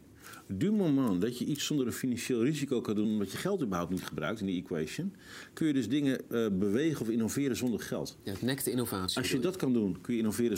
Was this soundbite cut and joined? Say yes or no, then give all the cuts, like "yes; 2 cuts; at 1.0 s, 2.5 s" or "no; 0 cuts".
no; 0 cuts